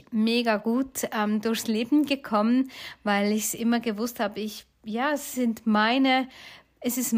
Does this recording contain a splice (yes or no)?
no